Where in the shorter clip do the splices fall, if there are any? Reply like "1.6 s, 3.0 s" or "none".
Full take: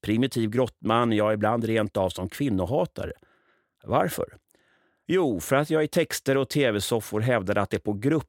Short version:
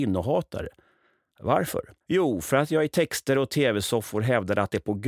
2.0 s